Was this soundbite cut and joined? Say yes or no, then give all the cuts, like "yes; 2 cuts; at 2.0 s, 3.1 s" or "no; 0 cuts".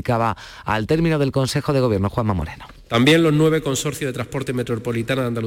no; 0 cuts